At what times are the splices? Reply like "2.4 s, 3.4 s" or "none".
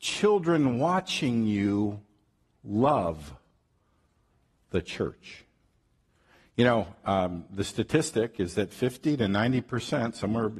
none